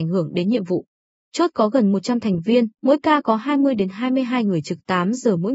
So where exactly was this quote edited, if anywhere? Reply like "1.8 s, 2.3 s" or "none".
1.2 s, 2.8 s